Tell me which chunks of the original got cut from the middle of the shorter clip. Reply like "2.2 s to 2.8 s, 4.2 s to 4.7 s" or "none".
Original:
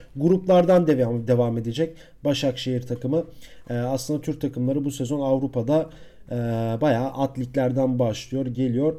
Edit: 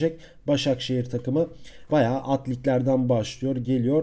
3.7 s to 6.8 s

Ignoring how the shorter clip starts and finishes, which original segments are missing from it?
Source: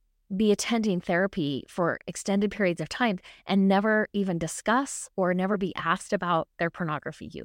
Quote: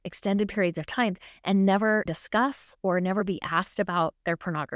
4.1 s to 4.4 s

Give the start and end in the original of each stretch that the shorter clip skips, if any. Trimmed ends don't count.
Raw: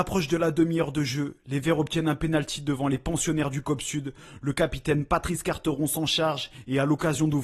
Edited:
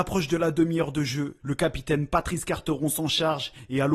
1.4 s to 4.4 s

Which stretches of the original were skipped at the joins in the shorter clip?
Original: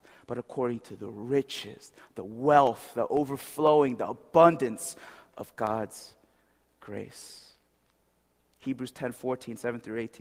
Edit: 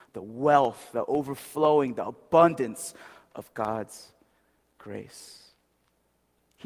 none

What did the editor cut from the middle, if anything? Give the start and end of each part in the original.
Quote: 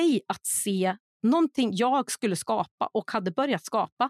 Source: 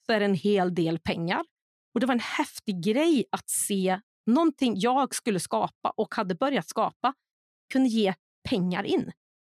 none

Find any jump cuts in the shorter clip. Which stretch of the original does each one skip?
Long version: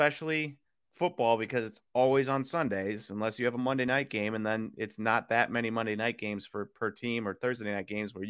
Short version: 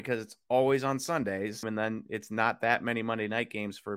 3.1 s to 4.3 s

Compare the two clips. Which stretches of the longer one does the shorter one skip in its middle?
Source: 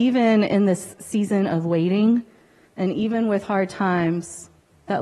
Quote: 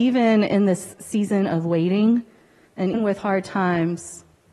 2.9 s to 3.2 s

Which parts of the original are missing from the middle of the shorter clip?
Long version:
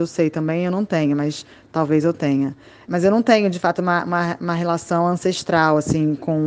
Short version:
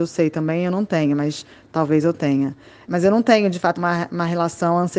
3.8 s to 4.0 s

